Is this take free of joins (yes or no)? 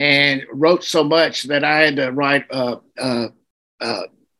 no